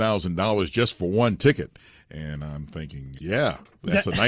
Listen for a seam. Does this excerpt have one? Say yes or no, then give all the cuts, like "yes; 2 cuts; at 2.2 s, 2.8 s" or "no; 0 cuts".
yes; 1 cut; at 3.2 s